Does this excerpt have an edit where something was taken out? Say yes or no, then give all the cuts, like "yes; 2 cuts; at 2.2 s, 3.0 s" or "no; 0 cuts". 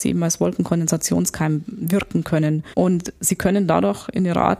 yes; 1 cut; at 2.7 s